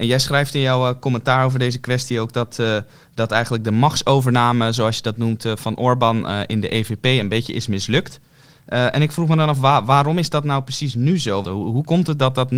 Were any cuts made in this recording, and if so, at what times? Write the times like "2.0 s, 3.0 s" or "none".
11.4 s